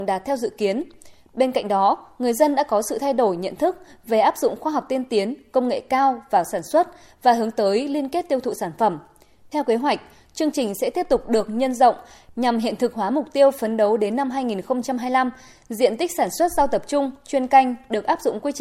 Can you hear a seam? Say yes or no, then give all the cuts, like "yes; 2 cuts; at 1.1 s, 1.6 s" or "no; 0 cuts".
no; 0 cuts